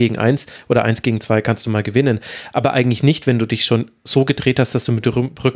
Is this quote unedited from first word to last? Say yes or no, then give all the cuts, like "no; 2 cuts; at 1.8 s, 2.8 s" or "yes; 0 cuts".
yes; 0 cuts